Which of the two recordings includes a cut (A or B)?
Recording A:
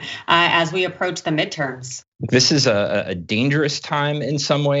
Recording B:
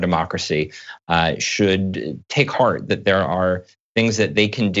A